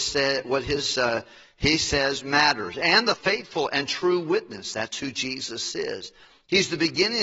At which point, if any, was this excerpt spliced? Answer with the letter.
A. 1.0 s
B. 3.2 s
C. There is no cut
B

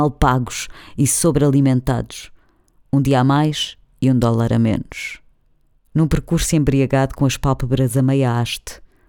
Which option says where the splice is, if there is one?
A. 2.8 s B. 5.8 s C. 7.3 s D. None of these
B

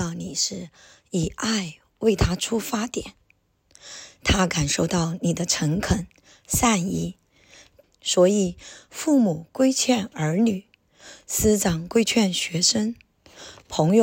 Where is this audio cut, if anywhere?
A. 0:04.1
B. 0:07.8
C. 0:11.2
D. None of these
B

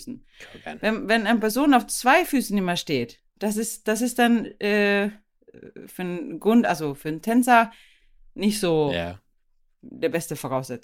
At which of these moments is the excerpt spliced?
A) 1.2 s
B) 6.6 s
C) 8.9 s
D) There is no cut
D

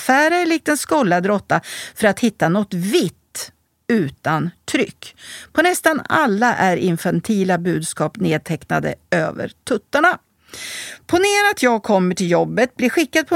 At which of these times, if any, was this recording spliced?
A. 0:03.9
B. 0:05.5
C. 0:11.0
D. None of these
D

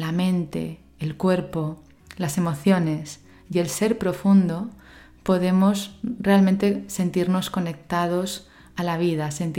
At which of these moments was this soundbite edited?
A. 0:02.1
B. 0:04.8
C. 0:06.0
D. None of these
D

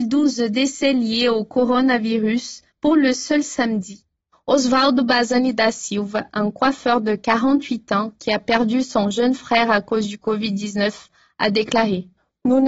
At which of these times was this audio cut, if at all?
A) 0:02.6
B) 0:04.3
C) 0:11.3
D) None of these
B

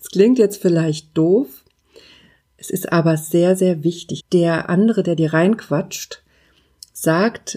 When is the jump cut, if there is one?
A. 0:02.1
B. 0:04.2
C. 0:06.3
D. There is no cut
B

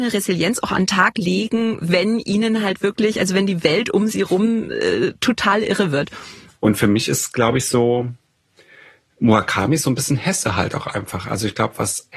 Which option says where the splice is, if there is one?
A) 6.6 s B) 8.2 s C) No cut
A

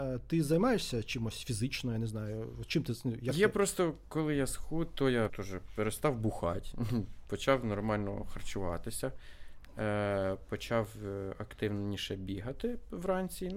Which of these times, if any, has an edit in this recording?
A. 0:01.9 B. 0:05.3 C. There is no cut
B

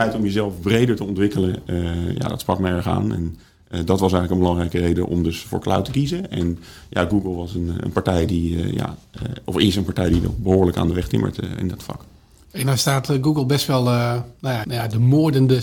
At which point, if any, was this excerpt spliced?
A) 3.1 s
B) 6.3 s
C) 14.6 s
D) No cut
C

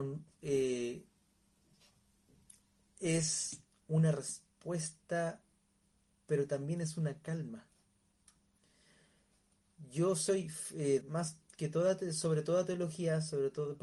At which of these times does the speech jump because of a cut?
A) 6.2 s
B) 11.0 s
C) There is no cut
B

